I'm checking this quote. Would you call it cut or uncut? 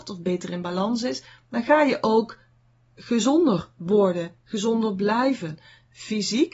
uncut